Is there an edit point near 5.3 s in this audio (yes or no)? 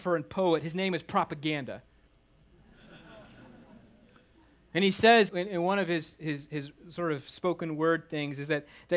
yes